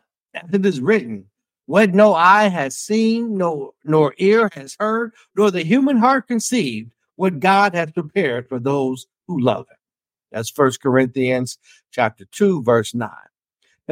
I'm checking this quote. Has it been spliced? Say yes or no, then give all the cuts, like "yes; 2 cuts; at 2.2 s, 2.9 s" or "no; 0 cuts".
no; 0 cuts